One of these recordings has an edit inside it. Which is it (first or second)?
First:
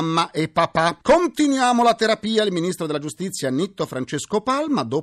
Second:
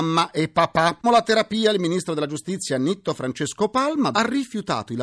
second